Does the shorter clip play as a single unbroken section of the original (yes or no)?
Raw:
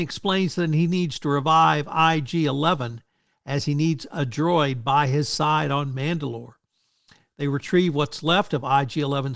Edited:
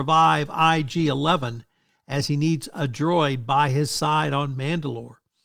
yes